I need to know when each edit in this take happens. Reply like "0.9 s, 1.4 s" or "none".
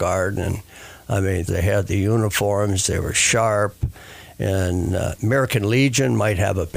1.5 s